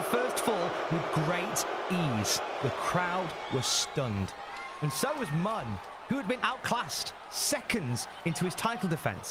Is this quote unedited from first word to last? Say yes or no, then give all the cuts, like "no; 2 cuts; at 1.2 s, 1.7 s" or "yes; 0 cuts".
yes; 0 cuts